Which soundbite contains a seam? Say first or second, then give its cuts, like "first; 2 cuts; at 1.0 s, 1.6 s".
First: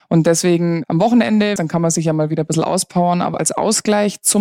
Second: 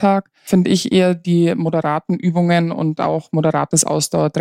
first; 2 cuts; at 1.6 s, 3.3 s